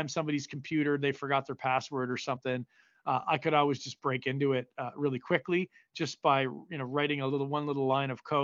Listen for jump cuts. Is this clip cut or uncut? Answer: uncut